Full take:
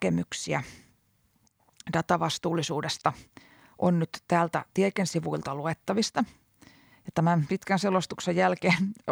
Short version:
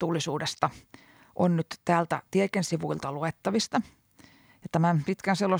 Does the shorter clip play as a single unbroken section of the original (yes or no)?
yes